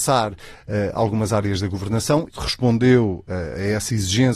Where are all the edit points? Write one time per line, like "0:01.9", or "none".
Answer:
0:02.3